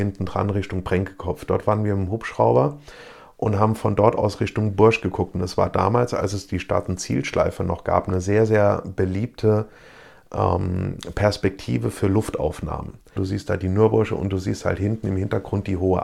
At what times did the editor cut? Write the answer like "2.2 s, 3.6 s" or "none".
13.2 s

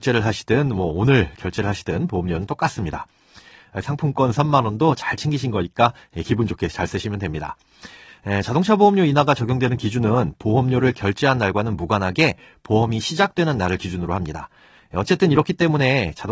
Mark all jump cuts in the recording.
3.8 s, 14.8 s

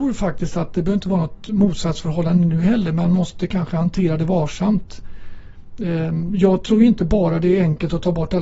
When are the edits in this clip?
none

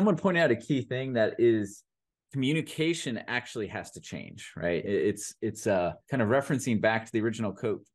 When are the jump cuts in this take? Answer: 4.8 s, 6.0 s

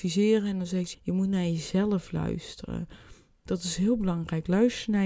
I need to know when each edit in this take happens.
0.9 s

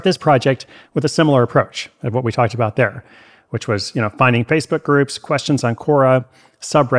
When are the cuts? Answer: none

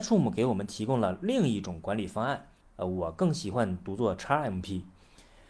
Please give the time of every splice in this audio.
2.6 s

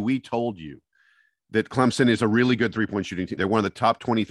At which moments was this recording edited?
3.4 s

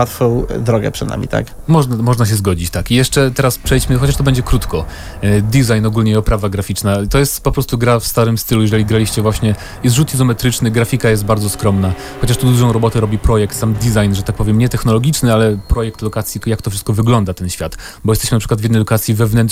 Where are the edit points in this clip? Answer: 16.4 s

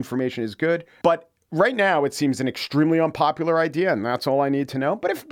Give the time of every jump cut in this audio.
1.0 s

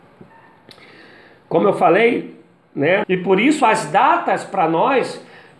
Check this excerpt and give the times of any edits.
3.0 s

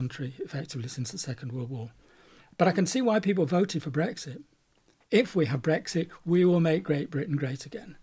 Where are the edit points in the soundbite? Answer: 5.0 s

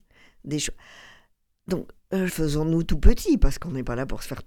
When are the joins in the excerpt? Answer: 2.3 s

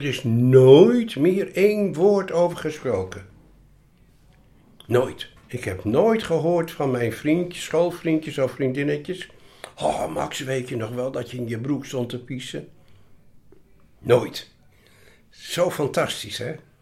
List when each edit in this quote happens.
5.4 s

